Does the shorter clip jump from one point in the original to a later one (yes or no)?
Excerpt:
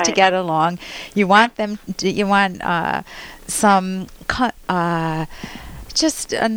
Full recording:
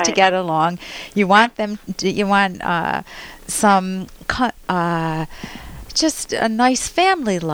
no